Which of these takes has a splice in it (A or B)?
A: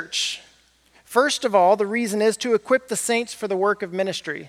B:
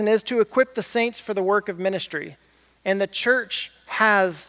B